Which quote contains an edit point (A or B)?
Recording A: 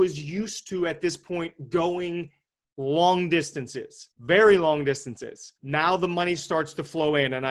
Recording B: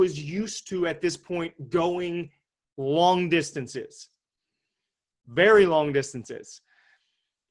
A